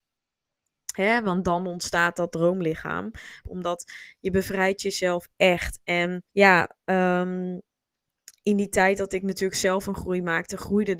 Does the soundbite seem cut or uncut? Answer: cut